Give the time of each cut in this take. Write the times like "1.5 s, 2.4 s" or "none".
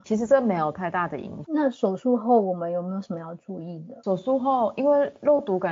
1.4 s